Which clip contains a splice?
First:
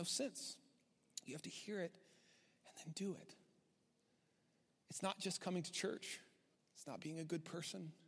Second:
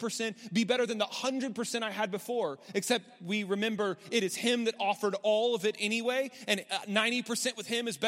first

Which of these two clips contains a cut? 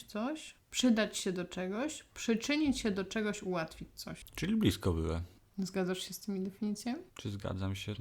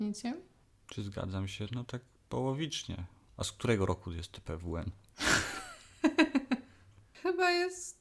first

